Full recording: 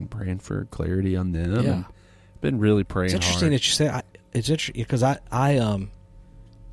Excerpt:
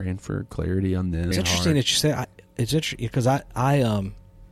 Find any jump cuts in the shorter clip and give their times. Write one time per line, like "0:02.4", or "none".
0:01.3